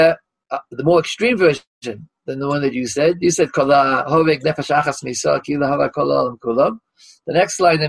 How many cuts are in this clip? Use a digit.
0